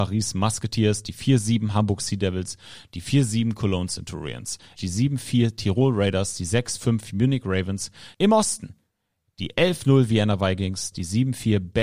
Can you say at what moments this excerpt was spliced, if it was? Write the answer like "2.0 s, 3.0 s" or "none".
4.8 s, 8.1 s, 10.9 s